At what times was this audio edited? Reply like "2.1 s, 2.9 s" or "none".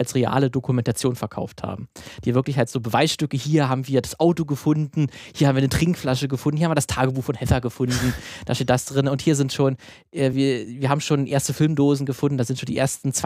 none